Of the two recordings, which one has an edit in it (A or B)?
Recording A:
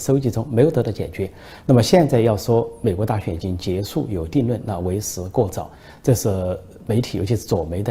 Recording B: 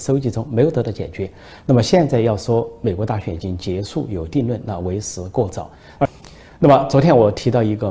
B